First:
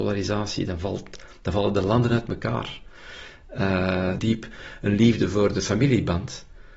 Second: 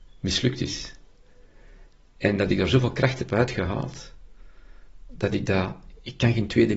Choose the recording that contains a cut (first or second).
first